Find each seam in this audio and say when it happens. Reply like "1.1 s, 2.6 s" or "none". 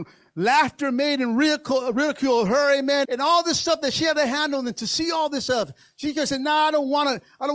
3.0 s